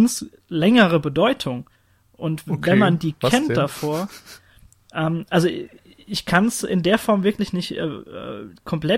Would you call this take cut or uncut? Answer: uncut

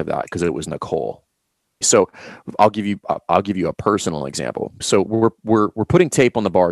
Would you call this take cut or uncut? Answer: cut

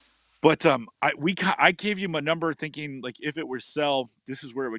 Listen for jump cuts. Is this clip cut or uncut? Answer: uncut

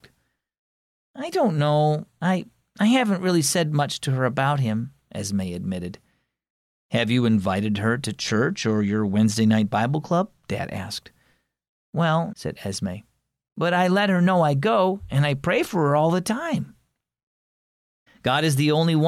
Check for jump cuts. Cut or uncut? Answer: cut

